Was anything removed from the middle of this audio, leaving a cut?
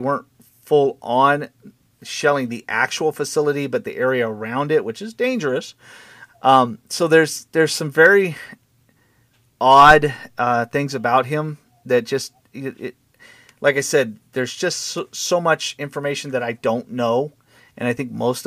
yes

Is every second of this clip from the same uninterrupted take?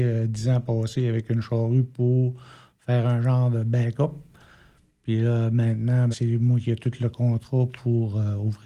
no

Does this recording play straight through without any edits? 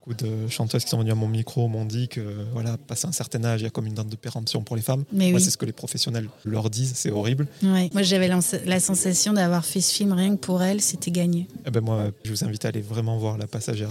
no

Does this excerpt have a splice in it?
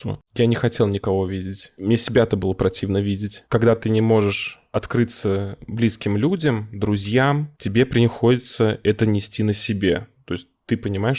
no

